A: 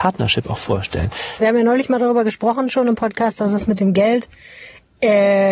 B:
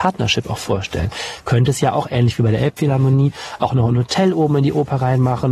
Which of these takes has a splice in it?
A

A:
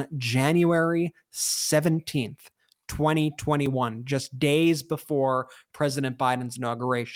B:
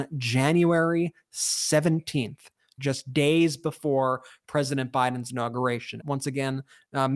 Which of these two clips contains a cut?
B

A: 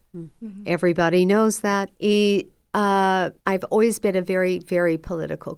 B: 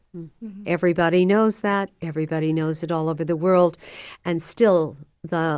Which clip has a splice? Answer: A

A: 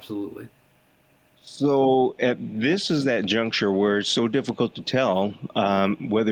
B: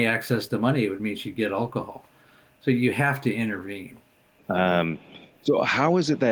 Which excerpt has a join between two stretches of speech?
B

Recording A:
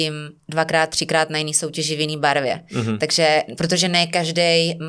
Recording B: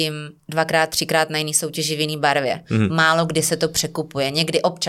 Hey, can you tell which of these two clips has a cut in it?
B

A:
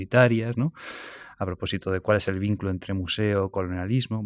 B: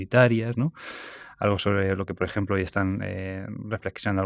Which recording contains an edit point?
A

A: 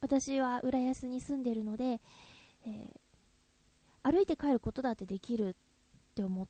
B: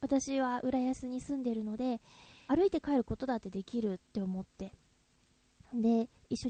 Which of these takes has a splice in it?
B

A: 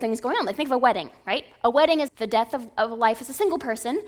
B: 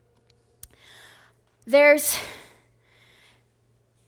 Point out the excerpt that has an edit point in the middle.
A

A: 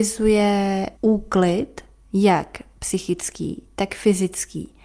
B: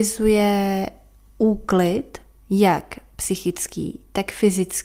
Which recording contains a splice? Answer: A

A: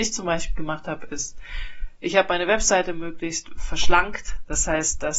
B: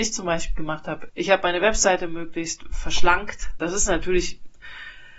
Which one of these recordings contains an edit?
B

